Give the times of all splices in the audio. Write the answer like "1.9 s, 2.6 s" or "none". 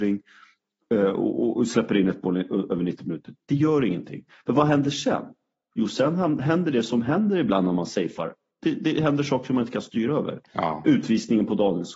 none